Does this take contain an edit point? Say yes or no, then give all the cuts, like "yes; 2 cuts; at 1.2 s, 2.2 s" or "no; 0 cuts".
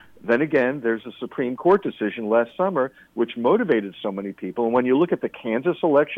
no; 0 cuts